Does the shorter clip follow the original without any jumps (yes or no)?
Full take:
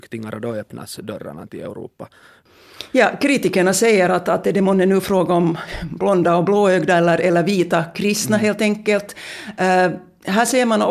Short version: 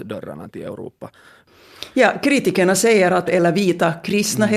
no